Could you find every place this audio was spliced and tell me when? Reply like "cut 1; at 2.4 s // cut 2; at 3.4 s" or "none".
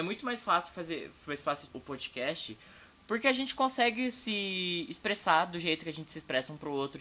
cut 1; at 1.7 s